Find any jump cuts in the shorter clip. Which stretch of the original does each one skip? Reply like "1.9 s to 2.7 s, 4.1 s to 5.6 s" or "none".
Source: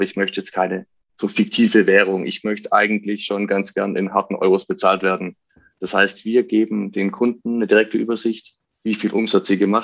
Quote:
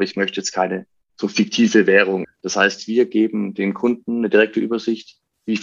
2.2 s to 5.6 s